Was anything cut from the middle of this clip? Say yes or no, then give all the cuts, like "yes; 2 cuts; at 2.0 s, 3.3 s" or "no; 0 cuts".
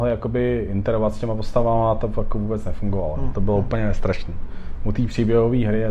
no; 0 cuts